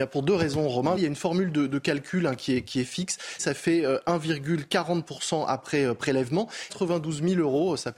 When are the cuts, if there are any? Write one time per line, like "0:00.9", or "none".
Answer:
0:01.0
0:03.4
0:06.7